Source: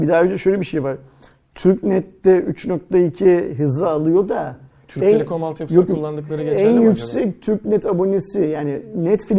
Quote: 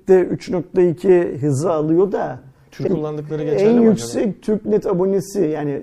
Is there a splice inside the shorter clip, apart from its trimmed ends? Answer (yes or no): yes